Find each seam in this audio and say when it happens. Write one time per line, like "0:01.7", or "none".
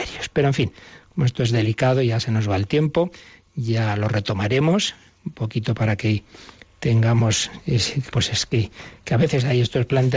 0:08.1